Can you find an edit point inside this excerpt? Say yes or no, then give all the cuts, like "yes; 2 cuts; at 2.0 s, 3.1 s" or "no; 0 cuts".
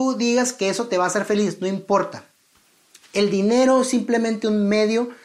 no; 0 cuts